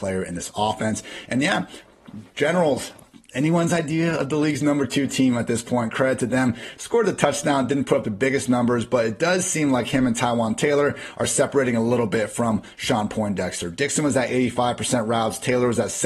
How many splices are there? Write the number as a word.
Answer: one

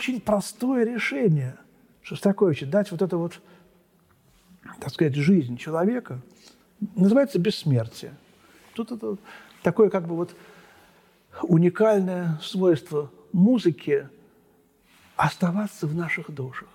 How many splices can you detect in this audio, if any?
one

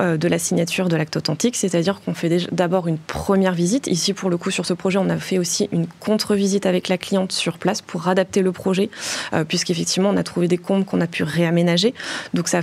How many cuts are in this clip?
zero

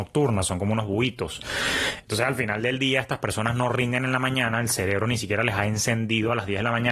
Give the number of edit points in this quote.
zero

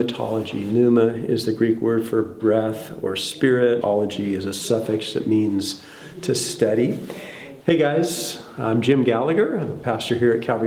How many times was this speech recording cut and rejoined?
two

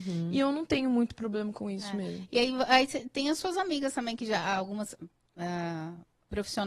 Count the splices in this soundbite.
zero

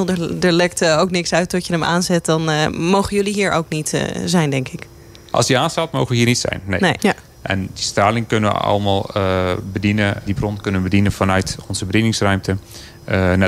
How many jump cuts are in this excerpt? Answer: two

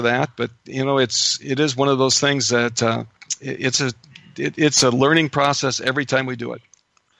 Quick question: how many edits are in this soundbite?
zero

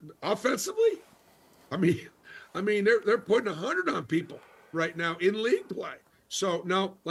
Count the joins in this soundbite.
zero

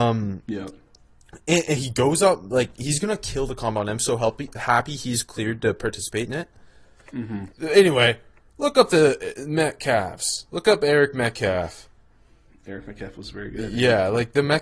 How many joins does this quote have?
one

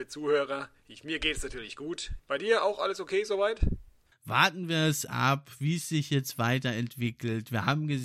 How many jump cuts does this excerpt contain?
two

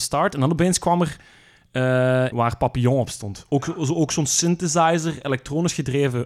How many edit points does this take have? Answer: one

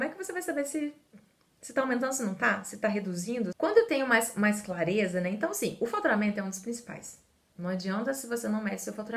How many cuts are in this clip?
one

